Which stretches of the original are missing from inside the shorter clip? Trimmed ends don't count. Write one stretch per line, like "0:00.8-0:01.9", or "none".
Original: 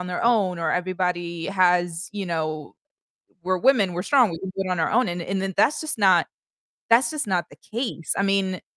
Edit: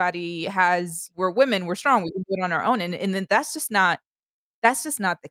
0:02.1-0:03.4